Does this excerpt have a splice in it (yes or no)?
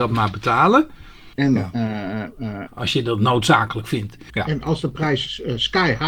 yes